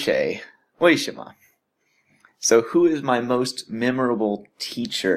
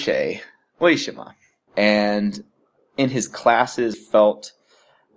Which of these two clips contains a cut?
second; 2 cuts; at 1.7 s, 3.9 s

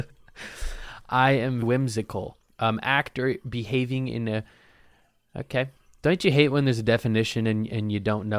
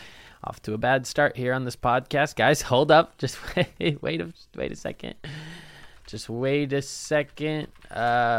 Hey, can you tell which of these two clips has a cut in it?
first; 1 cut; at 1.6 s

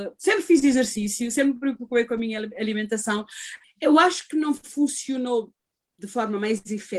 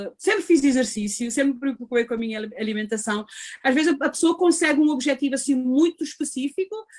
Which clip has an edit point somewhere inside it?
first; 1 cut; at 3.6 s

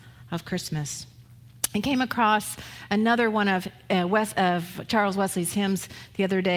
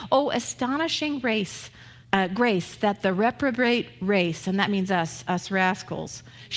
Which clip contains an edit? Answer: second; 1 cut; at 2.0 s

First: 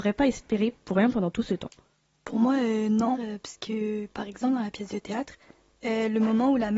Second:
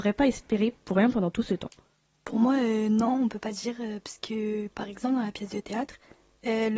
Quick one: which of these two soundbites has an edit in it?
first; 1 cut; at 3.1 s

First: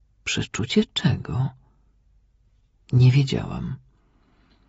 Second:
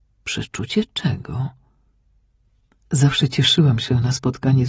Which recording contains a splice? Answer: second; 1 cut; at 2.7 s

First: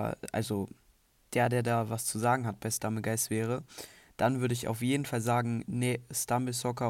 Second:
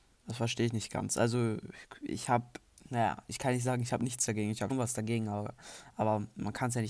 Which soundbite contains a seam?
second; 1 cut; at 4.7 s

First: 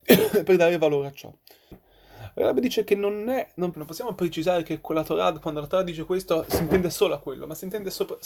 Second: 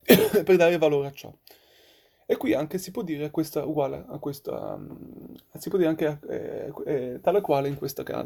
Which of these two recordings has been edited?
first; 2 cuts; at 1.7 s, 3.7 s

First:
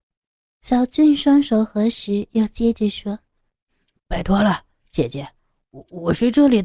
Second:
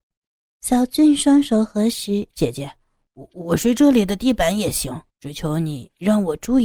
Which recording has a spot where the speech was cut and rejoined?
second; 2 cuts; at 2.3 s, 5.1 s

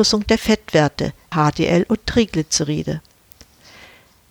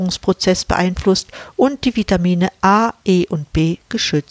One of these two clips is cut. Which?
first; 1 cut; at 1.3 s

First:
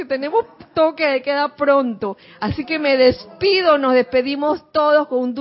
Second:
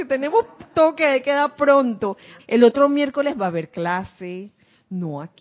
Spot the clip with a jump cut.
second; 1 cut; at 2.4 s

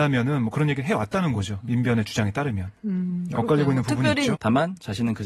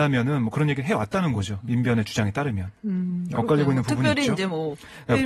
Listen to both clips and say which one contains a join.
first; 1 cut; at 4.3 s

